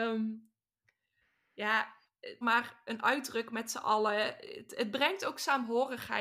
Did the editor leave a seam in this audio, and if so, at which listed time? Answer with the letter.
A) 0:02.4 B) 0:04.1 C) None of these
A